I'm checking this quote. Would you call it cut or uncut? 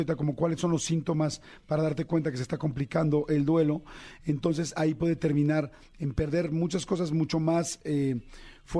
uncut